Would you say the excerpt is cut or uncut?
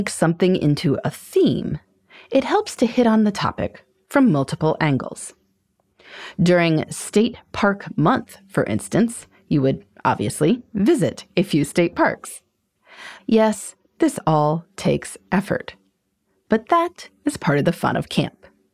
cut